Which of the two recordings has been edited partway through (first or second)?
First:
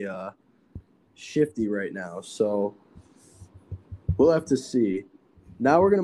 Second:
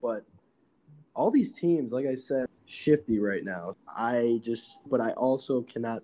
second